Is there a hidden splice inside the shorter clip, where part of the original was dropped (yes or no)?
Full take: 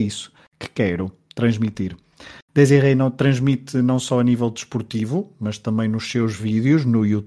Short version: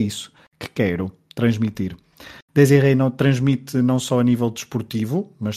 no